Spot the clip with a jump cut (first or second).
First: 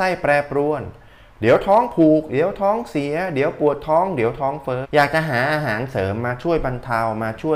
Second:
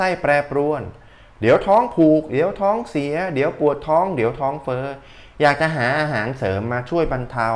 first